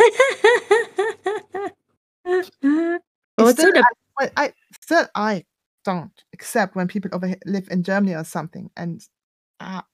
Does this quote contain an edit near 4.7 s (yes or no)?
no